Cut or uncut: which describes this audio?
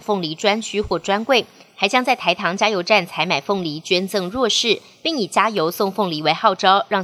uncut